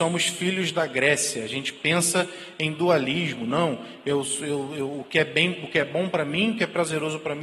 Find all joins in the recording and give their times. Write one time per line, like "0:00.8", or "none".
none